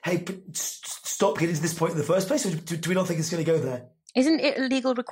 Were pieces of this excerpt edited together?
no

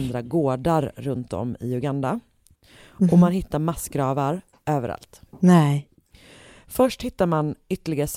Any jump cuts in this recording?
no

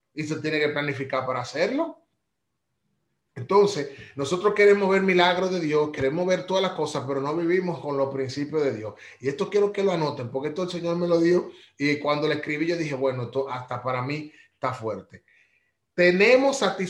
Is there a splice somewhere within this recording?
no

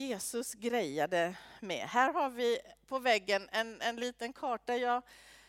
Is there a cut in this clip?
no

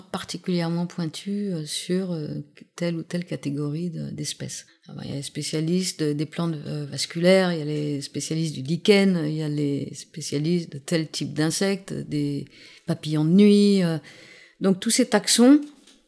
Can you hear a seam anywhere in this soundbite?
yes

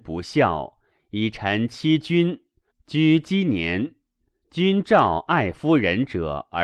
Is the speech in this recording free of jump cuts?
no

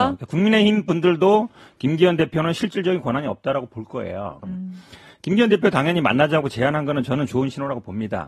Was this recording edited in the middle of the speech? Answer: yes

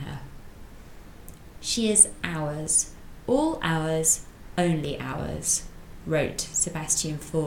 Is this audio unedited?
no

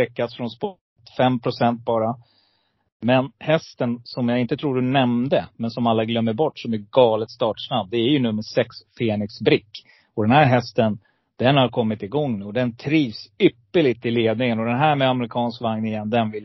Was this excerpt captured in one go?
yes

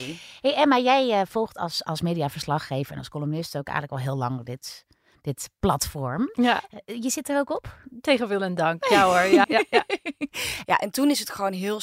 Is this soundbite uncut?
no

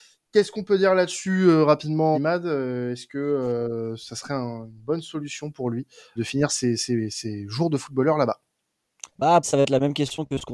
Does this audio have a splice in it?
yes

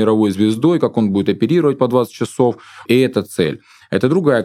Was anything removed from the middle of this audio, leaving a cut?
yes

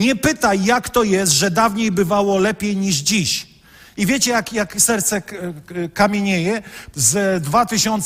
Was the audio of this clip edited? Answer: yes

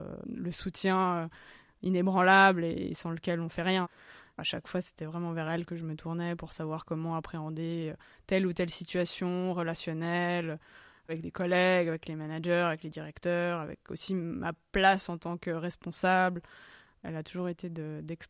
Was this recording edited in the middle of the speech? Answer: no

